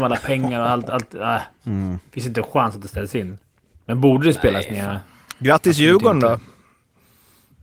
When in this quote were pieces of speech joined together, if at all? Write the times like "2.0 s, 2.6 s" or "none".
none